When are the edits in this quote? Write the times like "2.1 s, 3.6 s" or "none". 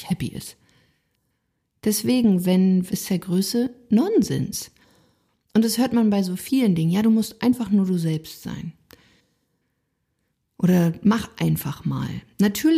2.9 s